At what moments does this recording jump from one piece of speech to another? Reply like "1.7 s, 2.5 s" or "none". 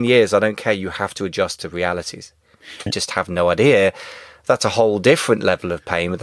2.9 s